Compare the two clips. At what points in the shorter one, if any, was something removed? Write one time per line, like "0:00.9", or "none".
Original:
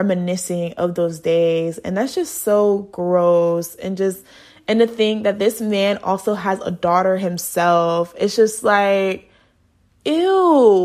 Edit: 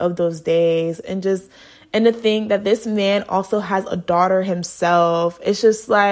0:01.0